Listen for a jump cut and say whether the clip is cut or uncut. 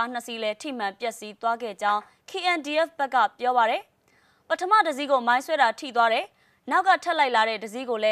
uncut